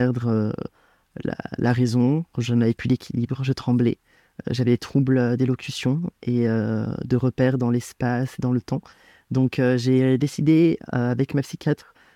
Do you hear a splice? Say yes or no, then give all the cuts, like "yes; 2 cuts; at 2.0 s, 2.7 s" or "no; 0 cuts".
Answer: no; 0 cuts